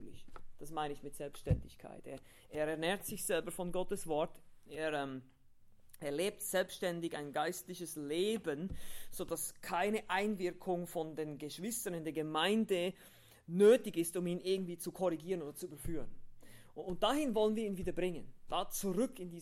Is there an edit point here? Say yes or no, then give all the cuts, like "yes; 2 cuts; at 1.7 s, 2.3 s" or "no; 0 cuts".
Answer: no; 0 cuts